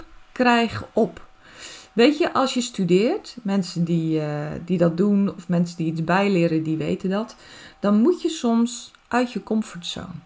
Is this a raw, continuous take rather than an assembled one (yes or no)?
yes